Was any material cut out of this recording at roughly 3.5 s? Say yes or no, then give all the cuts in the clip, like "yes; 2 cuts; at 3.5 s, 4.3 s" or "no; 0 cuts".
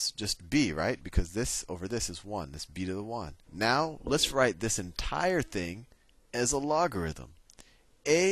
yes; 1 cut; at 3.5 s